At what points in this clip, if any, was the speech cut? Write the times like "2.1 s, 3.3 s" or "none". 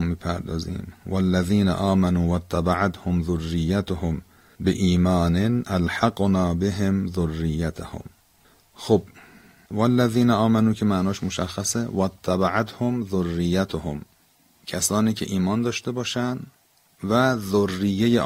none